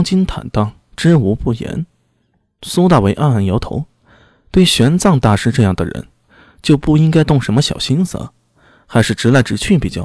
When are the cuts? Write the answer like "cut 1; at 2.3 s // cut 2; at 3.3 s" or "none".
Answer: none